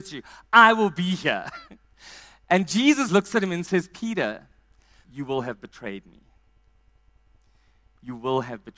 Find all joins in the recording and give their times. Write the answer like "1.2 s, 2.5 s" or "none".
3.1 s, 5.0 s